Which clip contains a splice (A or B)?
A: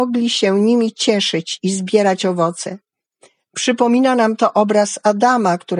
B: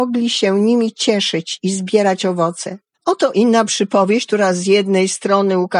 B